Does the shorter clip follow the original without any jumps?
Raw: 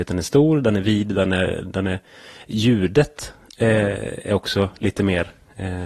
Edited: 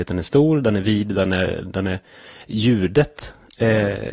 yes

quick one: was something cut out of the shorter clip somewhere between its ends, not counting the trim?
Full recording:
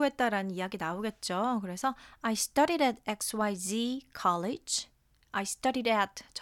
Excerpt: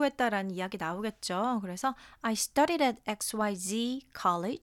no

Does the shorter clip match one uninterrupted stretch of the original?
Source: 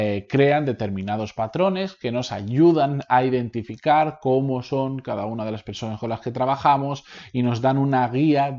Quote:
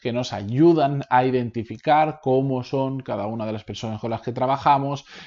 yes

